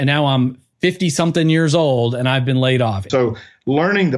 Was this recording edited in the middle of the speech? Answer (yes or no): yes